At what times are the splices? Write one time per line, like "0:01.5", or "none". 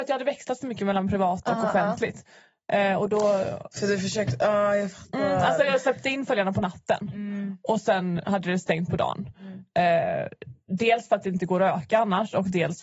none